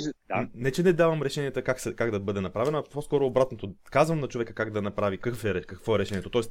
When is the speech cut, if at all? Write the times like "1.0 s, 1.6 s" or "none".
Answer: 5.2 s